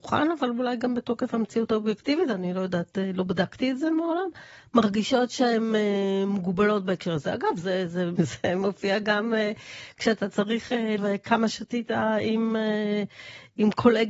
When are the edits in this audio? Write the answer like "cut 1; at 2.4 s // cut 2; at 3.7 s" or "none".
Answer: cut 1; at 8.2 s // cut 2; at 11.0 s